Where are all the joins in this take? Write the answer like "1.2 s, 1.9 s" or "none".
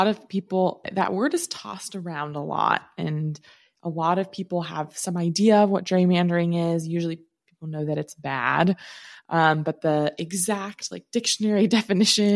none